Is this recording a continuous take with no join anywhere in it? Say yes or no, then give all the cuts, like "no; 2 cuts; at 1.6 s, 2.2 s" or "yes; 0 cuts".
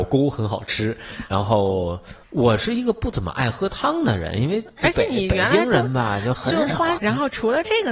no; 2 cuts; at 2.2 s, 7.0 s